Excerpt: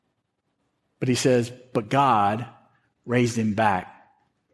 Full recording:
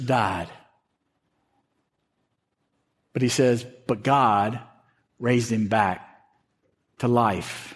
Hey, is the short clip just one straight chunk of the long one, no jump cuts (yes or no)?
yes